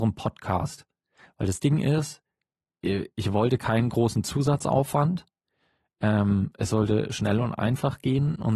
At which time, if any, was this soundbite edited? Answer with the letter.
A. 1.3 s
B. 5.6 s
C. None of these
C